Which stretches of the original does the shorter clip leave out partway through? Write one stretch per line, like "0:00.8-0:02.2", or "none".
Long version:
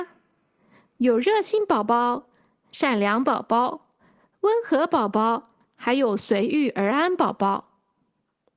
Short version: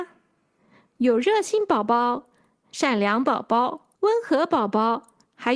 0:03.9-0:04.4